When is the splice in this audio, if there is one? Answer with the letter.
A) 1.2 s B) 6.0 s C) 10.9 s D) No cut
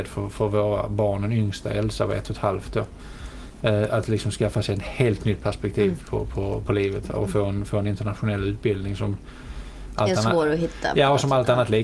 D